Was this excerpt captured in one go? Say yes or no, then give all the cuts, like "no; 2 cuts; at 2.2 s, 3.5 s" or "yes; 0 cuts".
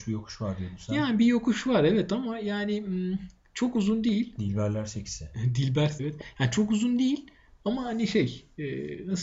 no; 1 cut; at 6.0 s